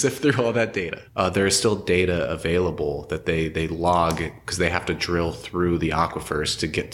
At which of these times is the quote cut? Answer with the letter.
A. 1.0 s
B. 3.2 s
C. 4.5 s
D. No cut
A